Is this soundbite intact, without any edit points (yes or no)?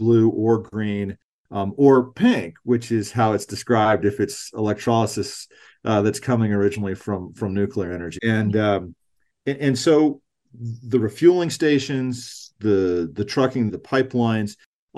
no